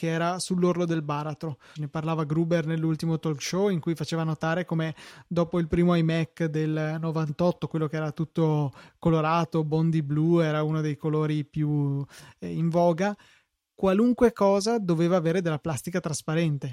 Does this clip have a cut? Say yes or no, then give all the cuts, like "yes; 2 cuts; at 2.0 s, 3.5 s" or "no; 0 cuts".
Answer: yes; 1 cut; at 1.8 s